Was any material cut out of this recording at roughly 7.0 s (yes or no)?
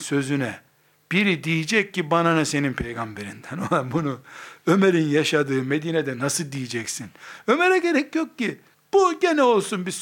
no